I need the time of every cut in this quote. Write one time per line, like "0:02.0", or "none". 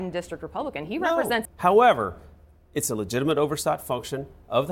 0:01.4

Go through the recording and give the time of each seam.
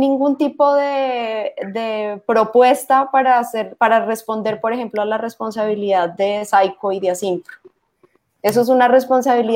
none

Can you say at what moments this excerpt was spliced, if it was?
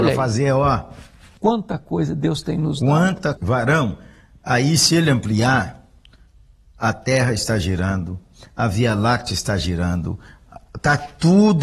0:01.4
0:03.4

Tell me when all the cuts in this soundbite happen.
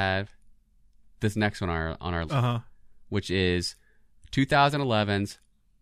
0:02.3

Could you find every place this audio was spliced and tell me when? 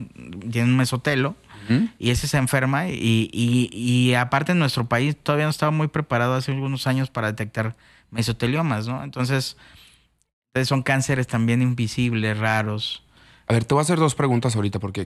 none

